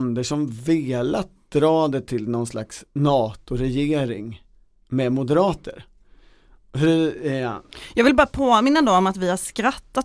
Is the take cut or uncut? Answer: uncut